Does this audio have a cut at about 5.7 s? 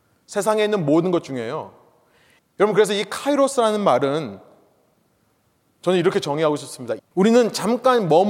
no; 2 cuts; at 2.4 s, 7.0 s

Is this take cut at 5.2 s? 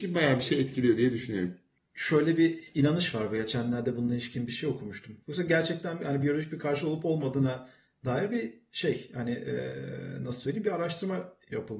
yes; 2 cuts; at 1.8 s, 5.2 s

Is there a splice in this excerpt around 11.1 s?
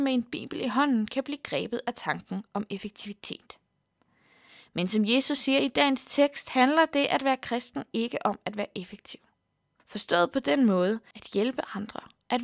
yes; 2 cuts; at 9.8 s, 11.1 s

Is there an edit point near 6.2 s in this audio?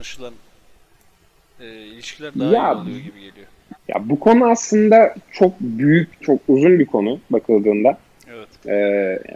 yes; 2 cuts; at 3.7 s, 6.2 s

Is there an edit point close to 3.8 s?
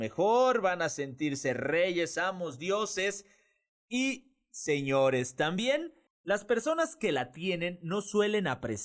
no; 1 cut; at 6.1 s

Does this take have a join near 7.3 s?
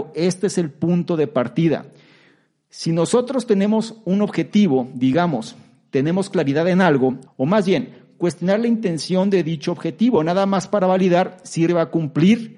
yes; 2 cuts; at 7.3 s, 11.7 s

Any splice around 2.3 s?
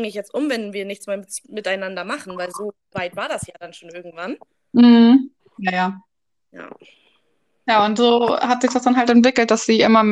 no; 1 cut; at 5.4 s

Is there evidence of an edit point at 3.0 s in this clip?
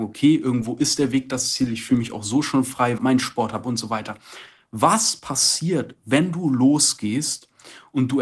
yes; 1 cut; at 3.0 s

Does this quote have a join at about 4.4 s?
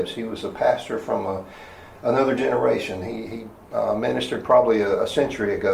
no; 0 cuts

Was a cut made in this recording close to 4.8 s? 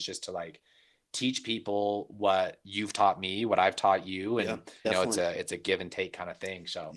yes; 1 cut; at 4.8 s

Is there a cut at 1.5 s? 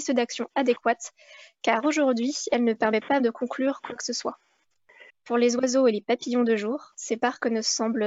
no; 2 cuts; at 3.2 s, 5.1 s

